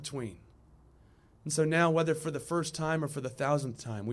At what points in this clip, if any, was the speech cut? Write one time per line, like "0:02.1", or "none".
0:01.4